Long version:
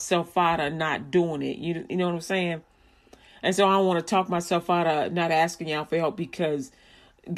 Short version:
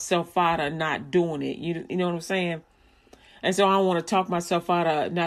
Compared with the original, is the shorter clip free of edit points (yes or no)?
yes